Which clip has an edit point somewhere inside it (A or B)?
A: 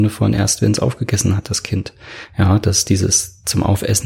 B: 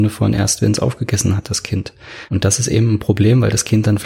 B